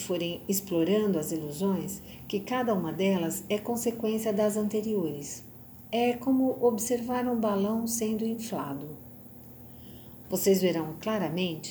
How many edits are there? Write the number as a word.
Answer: one